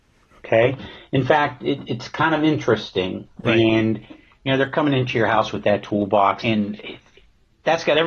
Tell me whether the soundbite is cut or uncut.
cut